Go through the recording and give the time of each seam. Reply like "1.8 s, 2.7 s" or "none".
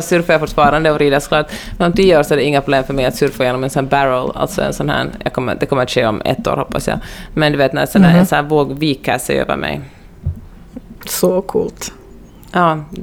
11.0 s

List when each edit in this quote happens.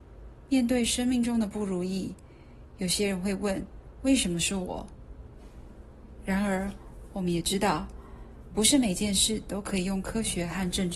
none

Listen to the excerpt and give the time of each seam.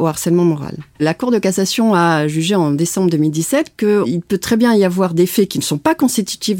0.9 s

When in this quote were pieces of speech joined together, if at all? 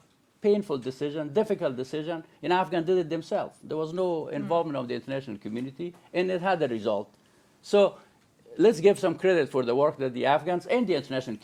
none

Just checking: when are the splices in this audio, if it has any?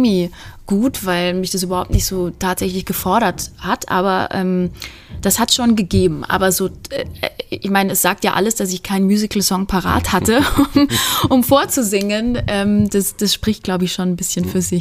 none

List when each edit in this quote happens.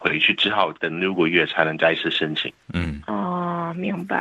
2.6 s

